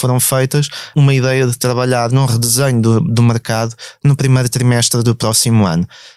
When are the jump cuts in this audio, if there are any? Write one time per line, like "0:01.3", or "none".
0:00.9